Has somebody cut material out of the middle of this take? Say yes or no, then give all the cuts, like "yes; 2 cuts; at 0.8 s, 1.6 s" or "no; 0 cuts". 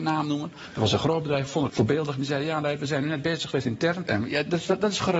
yes; 2 cuts; at 1.7 s, 4.1 s